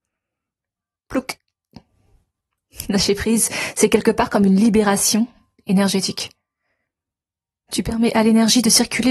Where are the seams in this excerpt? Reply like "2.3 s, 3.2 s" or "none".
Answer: 1.0 s